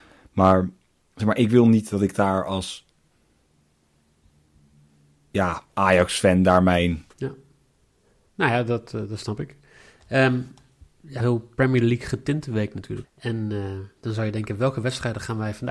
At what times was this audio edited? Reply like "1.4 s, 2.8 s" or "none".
7.1 s, 11.2 s, 13.0 s